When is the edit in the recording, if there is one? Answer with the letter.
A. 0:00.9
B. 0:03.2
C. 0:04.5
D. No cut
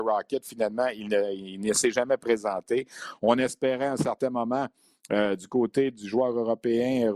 B